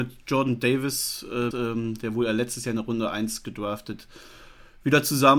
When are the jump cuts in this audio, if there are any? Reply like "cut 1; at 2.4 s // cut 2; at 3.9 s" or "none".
cut 1; at 1.5 s